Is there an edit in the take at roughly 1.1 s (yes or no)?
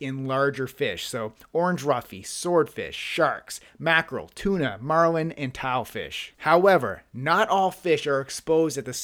no